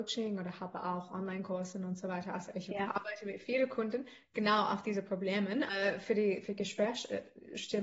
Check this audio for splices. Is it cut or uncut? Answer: cut